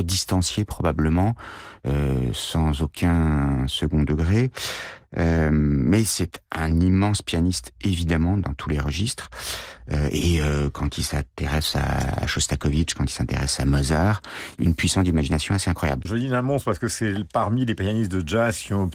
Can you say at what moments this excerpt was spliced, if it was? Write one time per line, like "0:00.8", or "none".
0:14.6
0:16.0

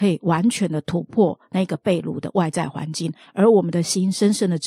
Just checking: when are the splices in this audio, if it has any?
none

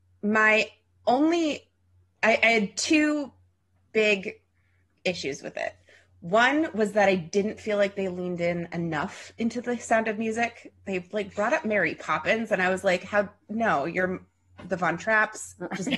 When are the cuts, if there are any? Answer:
none

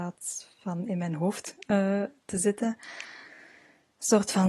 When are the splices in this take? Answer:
none

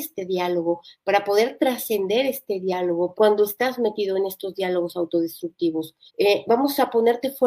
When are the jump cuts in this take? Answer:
0:03.2
0:06.1

